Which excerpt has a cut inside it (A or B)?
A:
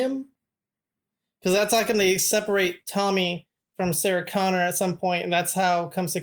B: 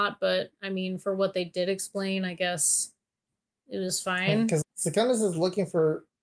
B